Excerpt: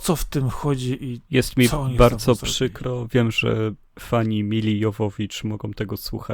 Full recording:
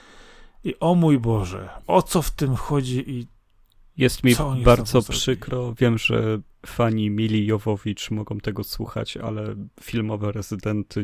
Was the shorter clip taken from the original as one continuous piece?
no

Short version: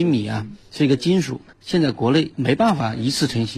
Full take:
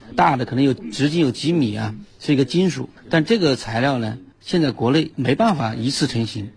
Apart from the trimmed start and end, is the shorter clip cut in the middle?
yes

